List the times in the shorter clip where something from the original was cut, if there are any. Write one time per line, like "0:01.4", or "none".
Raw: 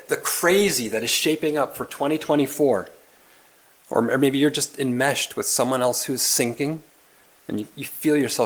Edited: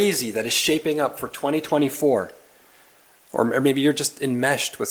none